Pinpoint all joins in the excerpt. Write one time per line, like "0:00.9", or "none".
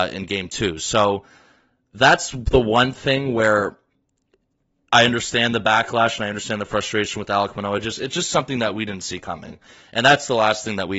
none